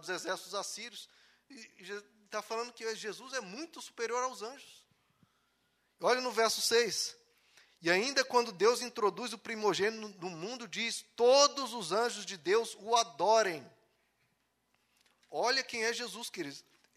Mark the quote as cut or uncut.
uncut